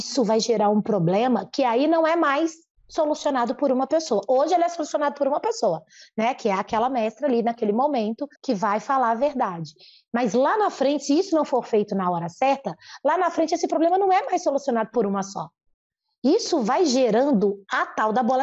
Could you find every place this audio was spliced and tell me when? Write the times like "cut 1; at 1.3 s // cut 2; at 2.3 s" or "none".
cut 1; at 8.3 s